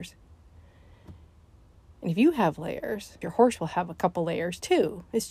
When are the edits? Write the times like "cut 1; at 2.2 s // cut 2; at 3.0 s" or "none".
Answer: cut 1; at 3.2 s